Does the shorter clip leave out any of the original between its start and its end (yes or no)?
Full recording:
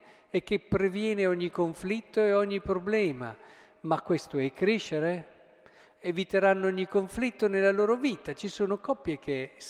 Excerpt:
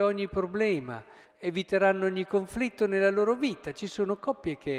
yes